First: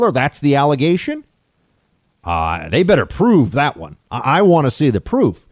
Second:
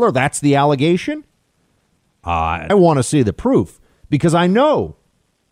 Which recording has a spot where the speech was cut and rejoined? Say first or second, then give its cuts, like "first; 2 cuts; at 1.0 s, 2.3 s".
second; 1 cut; at 2.7 s